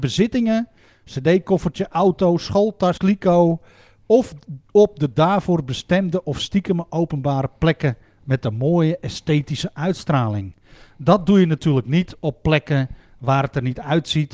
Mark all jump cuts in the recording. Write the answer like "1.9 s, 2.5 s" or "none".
3.0 s

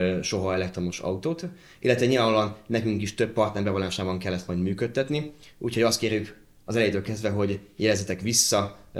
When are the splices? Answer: none

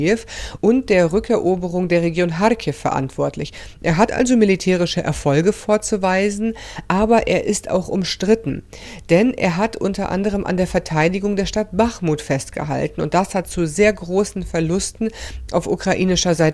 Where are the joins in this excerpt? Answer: none

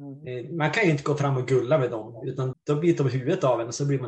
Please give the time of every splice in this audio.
2.5 s

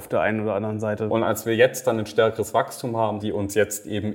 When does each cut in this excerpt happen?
1.1 s, 3.2 s

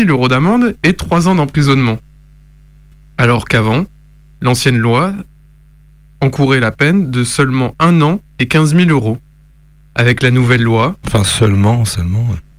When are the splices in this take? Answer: none

